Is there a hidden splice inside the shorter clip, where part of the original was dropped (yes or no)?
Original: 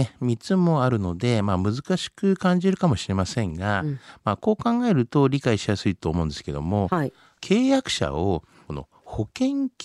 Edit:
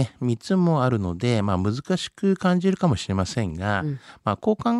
no